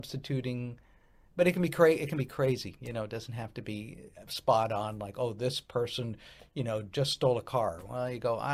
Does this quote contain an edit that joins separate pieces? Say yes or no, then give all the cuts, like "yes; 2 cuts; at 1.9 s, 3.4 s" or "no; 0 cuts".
no; 0 cuts